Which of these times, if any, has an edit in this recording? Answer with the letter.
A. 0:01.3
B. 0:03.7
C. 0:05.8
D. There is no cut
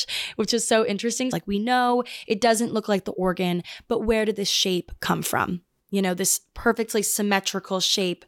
A